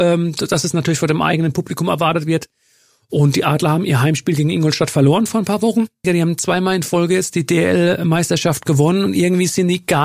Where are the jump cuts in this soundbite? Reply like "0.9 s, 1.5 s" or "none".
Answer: 6.0 s